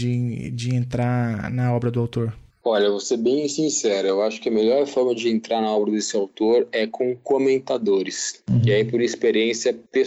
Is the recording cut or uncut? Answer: uncut